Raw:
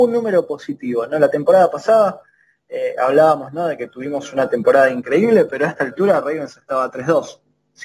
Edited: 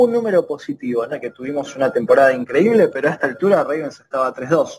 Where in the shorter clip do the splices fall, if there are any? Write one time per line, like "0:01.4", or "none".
0:01.1